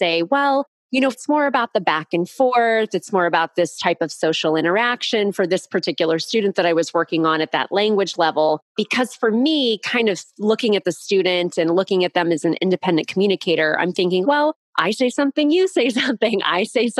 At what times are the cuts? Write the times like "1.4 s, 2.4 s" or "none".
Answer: 1.1 s, 14.2 s